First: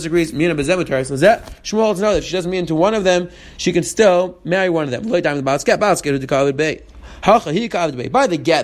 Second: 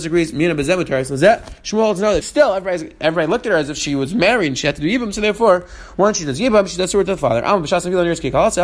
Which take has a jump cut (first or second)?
second